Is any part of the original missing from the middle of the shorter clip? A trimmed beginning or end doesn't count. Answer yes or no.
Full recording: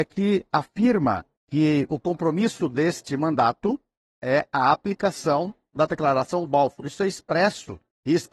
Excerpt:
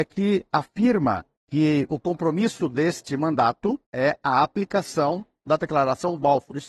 yes